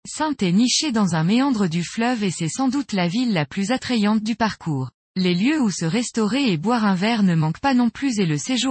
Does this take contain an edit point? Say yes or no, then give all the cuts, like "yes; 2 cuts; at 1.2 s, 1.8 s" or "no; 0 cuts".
yes; 1 cut; at 5.0 s